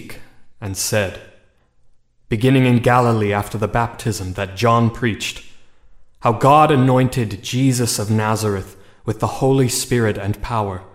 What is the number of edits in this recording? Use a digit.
1